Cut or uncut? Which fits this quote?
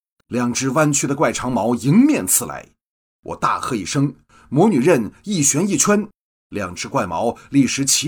uncut